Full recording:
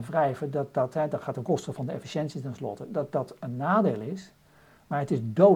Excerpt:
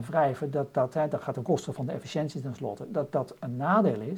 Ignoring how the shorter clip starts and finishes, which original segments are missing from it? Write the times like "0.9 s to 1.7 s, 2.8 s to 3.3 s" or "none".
none

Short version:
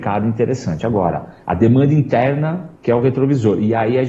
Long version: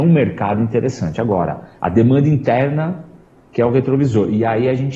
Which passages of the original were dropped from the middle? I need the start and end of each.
3.1 s to 3.5 s

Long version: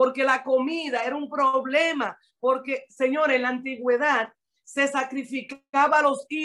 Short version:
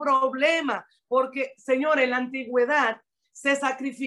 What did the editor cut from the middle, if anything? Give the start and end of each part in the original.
none

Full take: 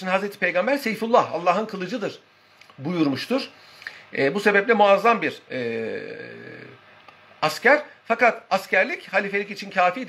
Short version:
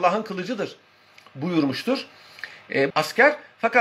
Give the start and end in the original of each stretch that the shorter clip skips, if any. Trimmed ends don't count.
4.3 s to 7.4 s

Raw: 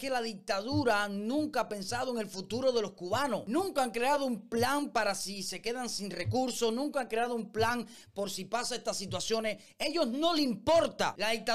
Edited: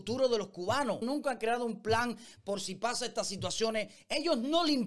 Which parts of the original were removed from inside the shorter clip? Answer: 3.5 s to 6.7 s

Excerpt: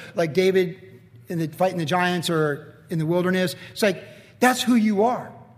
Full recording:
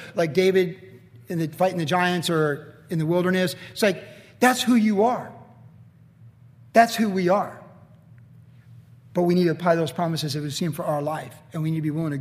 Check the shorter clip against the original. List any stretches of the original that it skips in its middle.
none

